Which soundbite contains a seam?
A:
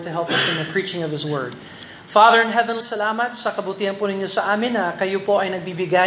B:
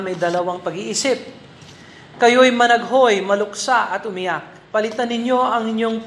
A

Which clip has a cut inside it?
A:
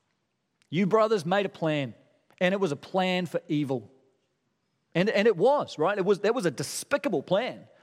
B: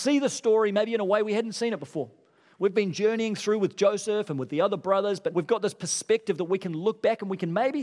B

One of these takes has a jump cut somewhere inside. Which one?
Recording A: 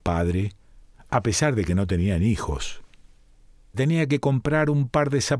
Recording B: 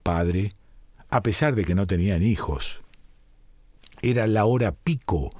A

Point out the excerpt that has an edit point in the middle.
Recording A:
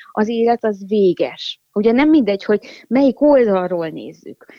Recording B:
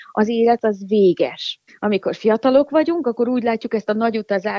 B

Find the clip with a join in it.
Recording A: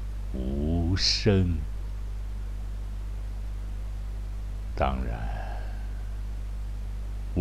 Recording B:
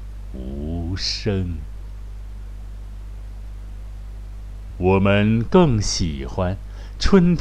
B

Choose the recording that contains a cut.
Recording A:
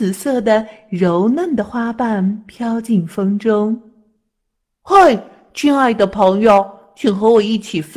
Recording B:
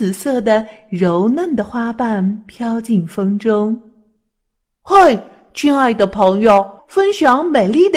B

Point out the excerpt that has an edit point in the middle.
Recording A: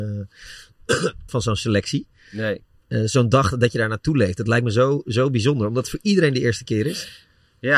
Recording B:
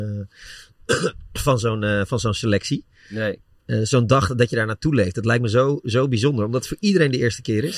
A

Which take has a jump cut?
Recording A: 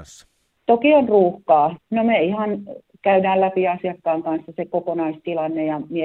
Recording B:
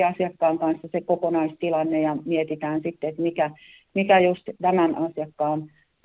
A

